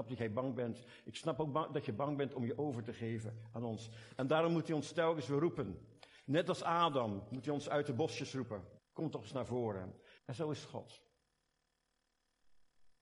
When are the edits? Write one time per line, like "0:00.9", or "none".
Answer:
0:08.8
0:10.2